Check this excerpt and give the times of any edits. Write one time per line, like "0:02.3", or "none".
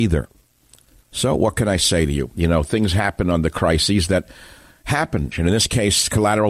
0:05.3